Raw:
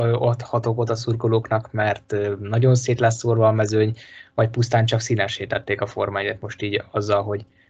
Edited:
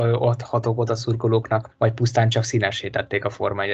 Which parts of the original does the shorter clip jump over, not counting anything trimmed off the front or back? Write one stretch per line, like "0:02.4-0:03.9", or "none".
0:01.7-0:04.3

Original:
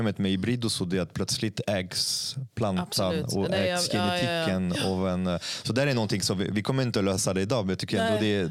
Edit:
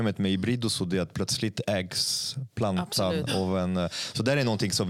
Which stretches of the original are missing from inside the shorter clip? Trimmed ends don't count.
0:03.3-0:04.8

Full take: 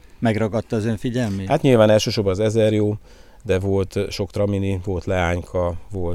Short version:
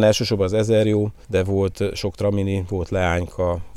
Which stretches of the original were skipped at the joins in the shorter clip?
0:03.1-0:03.4

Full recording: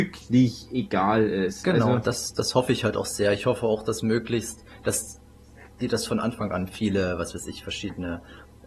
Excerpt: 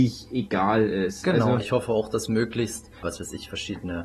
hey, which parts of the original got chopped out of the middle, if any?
0:02.0-0:03.3
0:04.8-0:07.2

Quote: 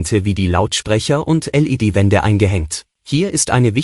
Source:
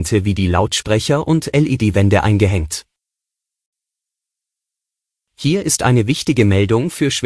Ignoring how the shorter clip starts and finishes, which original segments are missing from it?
0:02.9-0:05.3

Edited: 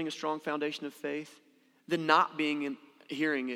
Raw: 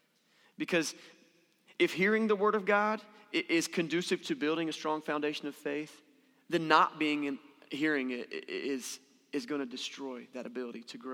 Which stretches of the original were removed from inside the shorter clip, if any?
none

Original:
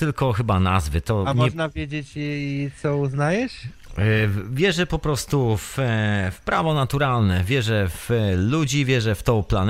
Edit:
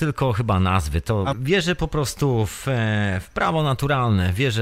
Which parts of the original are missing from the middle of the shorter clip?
0:01.3-0:04.4

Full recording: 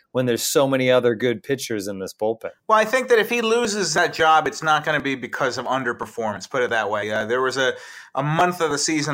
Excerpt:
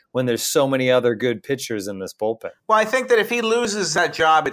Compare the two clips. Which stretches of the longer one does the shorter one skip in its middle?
none

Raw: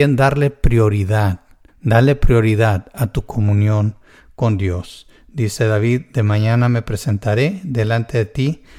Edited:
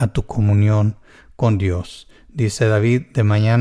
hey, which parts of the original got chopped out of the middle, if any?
none

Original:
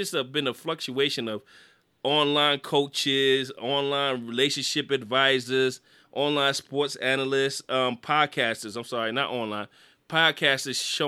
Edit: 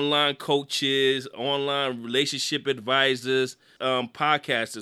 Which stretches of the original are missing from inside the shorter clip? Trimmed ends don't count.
0:06.0-0:07.7

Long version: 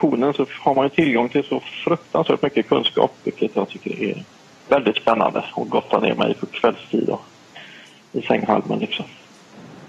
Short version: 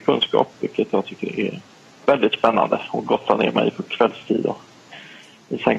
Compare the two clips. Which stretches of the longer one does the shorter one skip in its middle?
none

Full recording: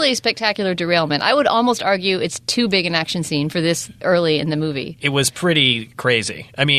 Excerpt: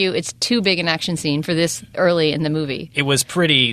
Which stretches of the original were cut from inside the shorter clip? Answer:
none

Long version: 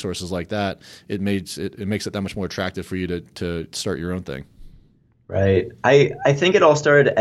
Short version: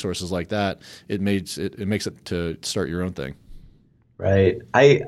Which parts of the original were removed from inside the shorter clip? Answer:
0:02.1-0:03.2

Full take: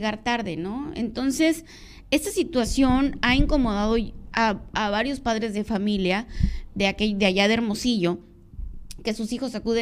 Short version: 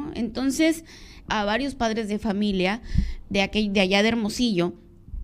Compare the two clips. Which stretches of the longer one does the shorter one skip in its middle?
0:02.1-0:04.7

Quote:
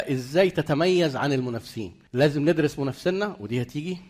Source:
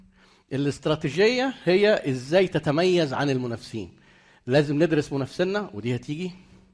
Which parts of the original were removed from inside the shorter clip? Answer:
0:04.0-0:04.4

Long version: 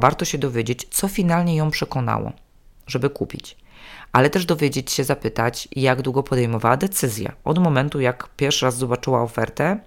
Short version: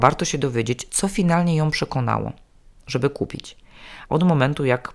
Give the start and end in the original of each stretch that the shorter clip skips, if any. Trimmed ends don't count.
0:04.1-0:07.4

